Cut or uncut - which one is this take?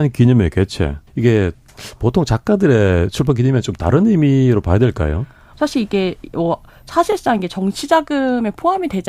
cut